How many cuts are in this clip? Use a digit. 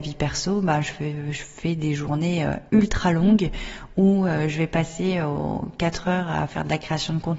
1